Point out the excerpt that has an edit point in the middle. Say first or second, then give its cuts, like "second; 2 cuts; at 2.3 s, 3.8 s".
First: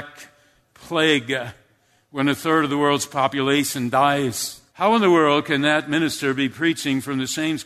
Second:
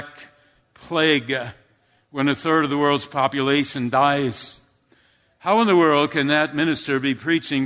first; 1 cut; at 4.7 s